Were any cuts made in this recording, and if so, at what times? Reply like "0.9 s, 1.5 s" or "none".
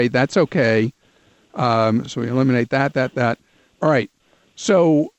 none